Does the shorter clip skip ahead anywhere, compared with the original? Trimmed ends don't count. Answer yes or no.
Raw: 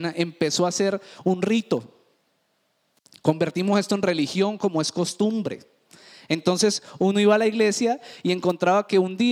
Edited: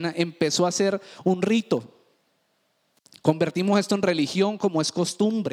no